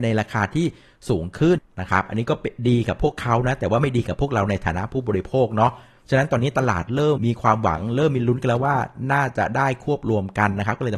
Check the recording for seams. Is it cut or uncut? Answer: cut